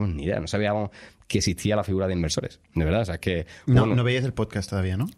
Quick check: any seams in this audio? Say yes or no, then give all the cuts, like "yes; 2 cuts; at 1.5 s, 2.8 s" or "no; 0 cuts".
no; 0 cuts